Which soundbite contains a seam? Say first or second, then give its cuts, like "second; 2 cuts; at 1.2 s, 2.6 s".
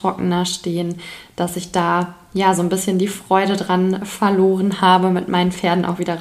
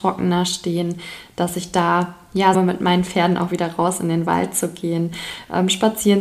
second; 1 cut; at 2.5 s